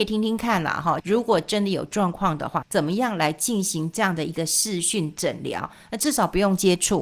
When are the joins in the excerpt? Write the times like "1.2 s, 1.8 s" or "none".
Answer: 1.0 s, 2.6 s